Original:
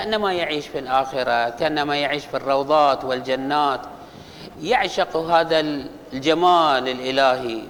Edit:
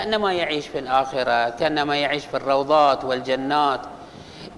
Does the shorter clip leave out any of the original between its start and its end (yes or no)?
no